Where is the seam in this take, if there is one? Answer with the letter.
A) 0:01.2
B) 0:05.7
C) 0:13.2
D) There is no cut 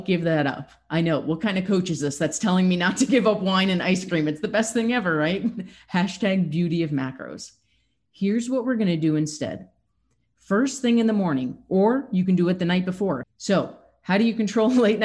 C